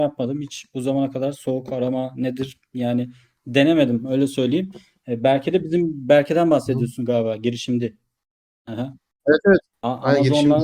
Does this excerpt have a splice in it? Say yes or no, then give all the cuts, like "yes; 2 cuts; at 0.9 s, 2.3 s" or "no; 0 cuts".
no; 0 cuts